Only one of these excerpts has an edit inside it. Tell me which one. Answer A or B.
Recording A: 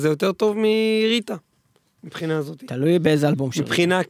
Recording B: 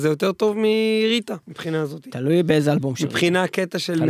B